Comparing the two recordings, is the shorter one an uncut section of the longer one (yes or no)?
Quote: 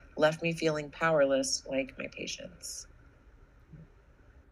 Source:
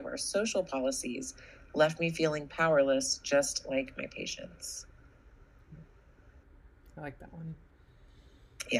no